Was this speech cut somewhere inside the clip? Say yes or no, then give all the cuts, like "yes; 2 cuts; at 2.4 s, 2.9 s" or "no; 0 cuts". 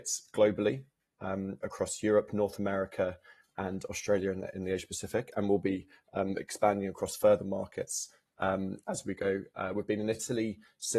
no; 0 cuts